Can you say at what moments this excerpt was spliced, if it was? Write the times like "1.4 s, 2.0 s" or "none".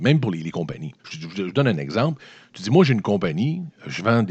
1.0 s